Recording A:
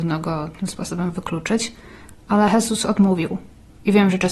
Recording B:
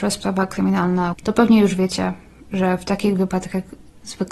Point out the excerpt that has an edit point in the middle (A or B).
B